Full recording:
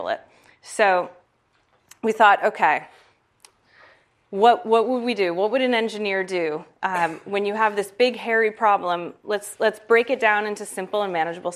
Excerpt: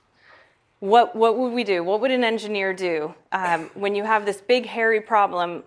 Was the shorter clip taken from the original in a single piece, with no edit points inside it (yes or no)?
yes